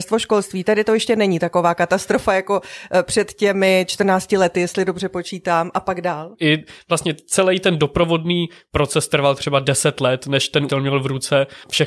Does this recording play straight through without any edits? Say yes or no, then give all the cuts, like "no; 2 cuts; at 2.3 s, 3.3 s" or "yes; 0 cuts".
no; 2 cuts; at 6.3 s, 10.7 s